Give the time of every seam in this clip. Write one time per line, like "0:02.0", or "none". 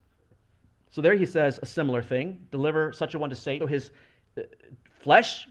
0:03.6